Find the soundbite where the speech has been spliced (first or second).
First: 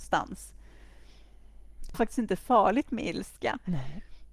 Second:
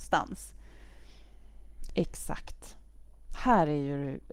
first